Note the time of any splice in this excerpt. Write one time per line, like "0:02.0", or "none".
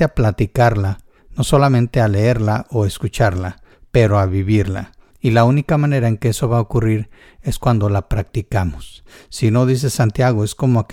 0:05.1